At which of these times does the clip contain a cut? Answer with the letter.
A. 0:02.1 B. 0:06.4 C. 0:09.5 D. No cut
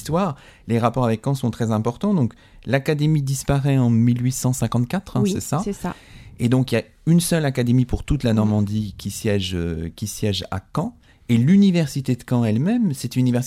D